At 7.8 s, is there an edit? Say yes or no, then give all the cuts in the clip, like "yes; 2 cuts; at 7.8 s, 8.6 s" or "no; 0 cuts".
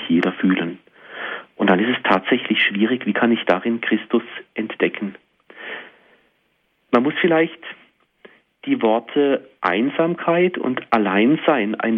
no; 0 cuts